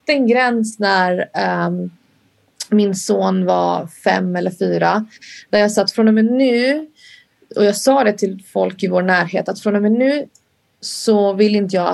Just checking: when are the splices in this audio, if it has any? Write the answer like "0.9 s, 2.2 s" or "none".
none